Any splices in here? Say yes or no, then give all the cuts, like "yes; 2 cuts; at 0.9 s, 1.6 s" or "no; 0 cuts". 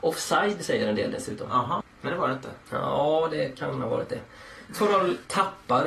yes; 1 cut; at 1.8 s